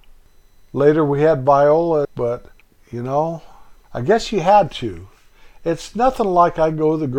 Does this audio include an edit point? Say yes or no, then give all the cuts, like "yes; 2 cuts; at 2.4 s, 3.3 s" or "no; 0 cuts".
yes; 1 cut; at 2.0 s